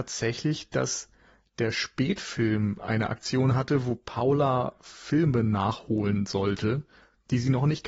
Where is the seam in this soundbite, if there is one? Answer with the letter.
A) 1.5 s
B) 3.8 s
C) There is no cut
C